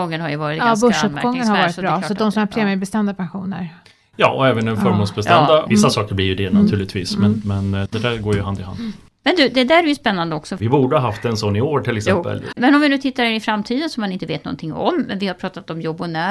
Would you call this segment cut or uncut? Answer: cut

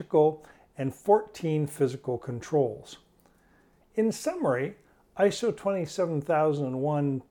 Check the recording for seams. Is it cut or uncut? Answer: cut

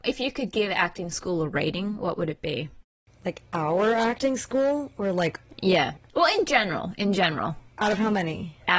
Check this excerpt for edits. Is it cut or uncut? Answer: uncut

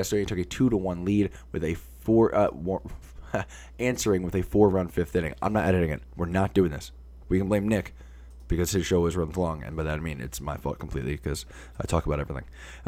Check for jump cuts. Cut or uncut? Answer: cut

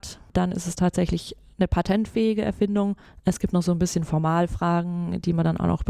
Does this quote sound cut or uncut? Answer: uncut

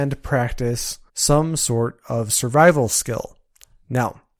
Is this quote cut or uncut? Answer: cut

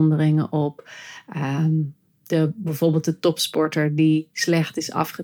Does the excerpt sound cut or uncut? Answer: uncut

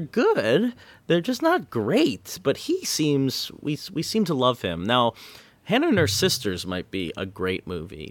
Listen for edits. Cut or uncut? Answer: uncut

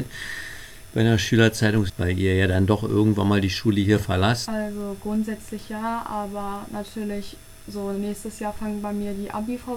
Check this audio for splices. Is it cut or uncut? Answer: cut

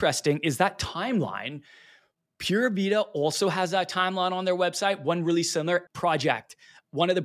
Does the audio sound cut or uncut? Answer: cut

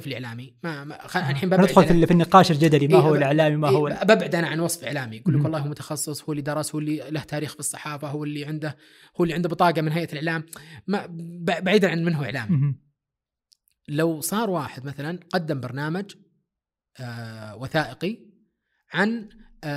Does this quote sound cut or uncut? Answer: uncut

